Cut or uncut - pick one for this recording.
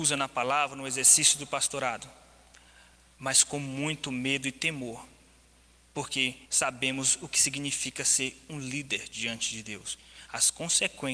cut